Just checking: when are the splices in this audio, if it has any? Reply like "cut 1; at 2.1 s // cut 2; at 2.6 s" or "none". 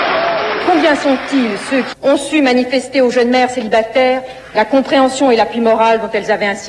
cut 1; at 1.9 s